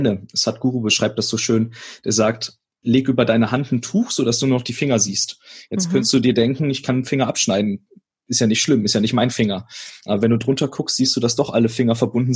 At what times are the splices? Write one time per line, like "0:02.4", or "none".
none